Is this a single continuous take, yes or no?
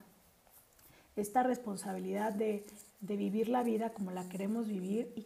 yes